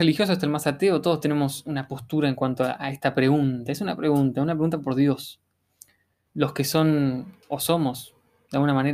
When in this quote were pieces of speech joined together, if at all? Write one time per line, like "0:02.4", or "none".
0:06.3
0:07.4